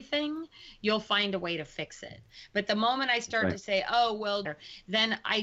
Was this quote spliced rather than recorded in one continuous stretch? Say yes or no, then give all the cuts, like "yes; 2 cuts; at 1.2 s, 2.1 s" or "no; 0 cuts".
yes; 1 cut; at 4.5 s